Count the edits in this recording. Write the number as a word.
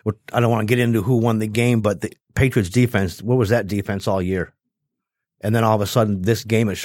zero